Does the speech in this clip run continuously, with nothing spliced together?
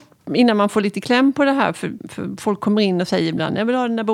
no; 1 cut; at 2.0 s

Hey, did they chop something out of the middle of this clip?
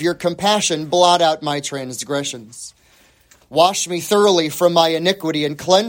no; 0 cuts

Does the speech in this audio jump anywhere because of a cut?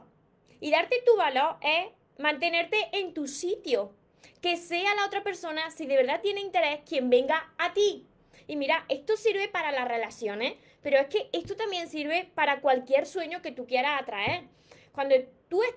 yes; 1 cut; at 8.4 s

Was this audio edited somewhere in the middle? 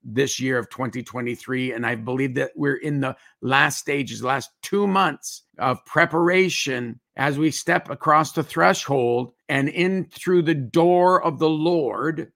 yes; 3 cuts; at 5.5 s, 7.1 s, 9.4 s

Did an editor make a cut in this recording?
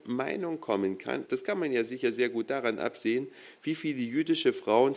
yes; 1 cut; at 1.3 s

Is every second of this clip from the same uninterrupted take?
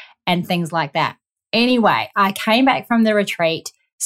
yes; 0 cuts

